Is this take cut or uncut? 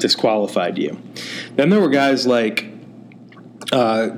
uncut